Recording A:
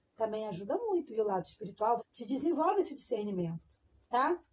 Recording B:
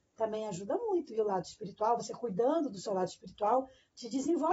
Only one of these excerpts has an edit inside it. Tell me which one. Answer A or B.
A